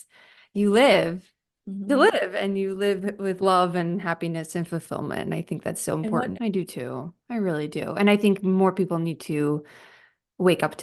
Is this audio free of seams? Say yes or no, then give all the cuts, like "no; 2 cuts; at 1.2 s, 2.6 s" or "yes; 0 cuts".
no; 1 cut; at 6.3 s